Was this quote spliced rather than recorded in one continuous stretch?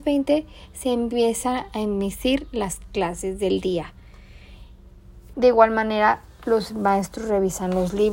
yes; 1 cut; at 5.3 s

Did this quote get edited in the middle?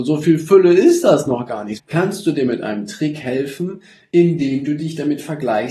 yes; 1 cut; at 1.8 s

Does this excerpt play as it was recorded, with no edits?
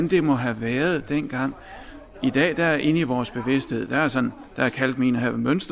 yes; 0 cuts

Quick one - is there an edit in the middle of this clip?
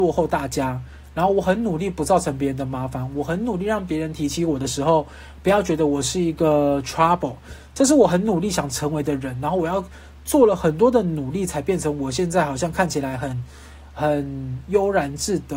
no; 0 cuts

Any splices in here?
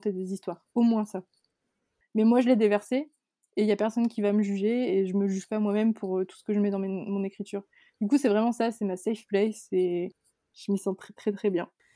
yes; 1 cut; at 2.0 s

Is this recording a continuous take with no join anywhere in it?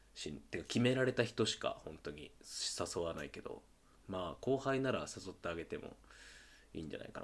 yes; 0 cuts

